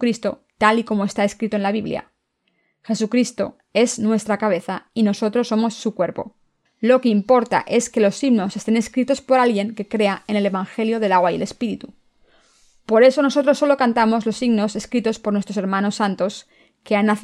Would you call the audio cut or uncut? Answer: cut